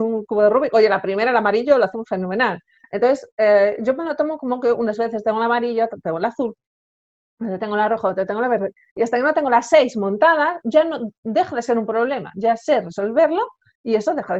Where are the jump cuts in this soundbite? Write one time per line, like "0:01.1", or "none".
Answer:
0:02.8
0:10.6

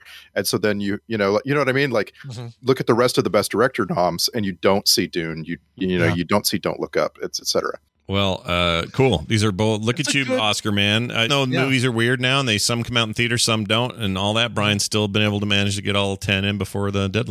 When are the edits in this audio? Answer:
0:07.9
0:11.3

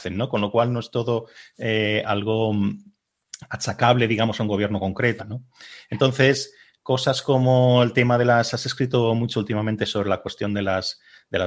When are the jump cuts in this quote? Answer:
0:05.2

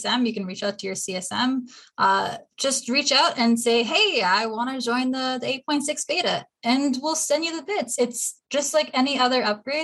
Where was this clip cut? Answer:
none

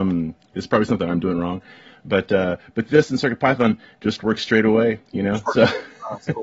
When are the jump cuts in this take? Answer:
none

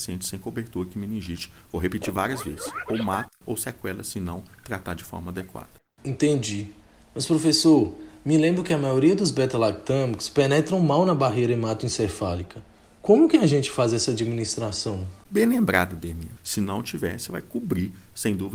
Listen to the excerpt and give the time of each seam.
0:15.2
0:16.4

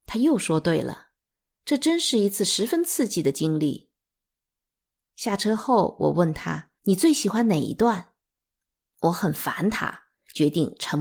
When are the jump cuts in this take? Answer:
0:06.8
0:08.8

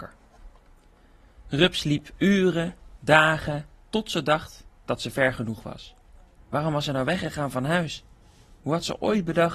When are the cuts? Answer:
0:03.8
0:06.4

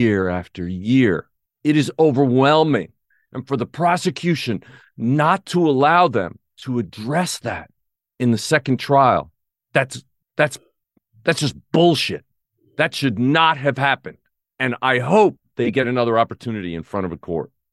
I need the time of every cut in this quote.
none

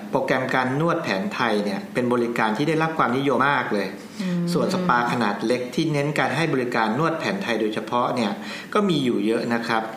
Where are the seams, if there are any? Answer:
0:03.4

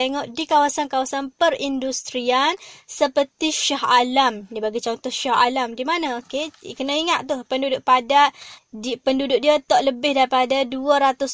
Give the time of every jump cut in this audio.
0:06.2
0:08.6

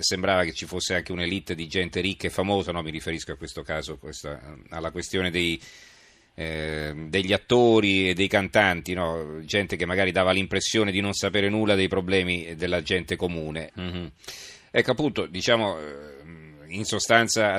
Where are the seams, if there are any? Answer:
0:13.7

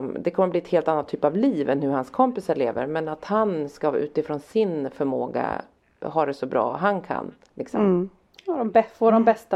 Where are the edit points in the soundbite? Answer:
none

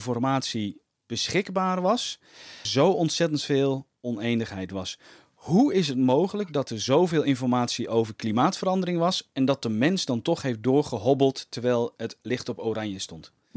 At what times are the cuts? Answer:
0:02.6

